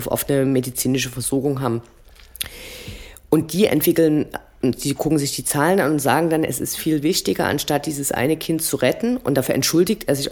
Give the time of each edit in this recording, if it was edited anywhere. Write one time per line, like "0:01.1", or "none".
0:06.8